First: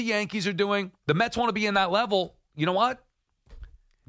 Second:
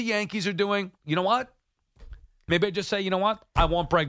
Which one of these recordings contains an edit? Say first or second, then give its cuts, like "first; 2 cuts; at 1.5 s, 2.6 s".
second; 2 cuts; at 1.0 s, 2.5 s